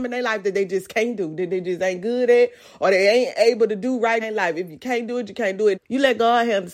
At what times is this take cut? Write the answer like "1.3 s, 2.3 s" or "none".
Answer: 4.2 s, 5.7 s